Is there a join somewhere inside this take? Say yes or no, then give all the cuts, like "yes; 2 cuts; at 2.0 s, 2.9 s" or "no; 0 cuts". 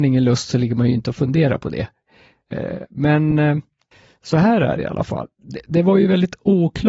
no; 0 cuts